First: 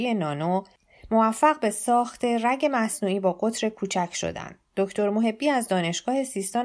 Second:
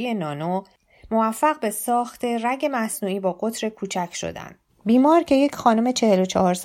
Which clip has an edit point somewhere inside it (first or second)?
second